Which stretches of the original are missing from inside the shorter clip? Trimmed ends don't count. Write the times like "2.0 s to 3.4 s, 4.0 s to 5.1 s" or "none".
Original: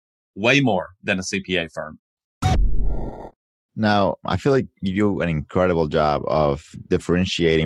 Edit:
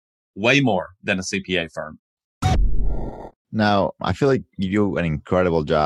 3.4 s to 3.6 s